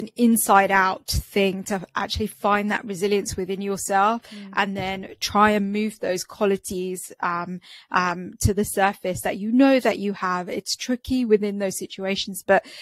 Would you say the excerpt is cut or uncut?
uncut